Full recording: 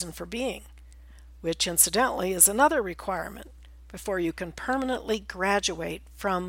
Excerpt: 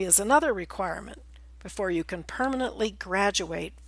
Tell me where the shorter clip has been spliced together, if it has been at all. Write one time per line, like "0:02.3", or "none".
none